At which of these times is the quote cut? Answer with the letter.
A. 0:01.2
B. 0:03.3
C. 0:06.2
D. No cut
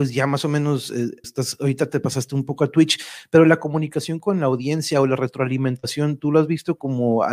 A